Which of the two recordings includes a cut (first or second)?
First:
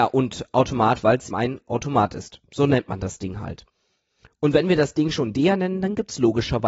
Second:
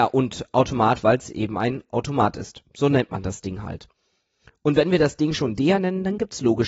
first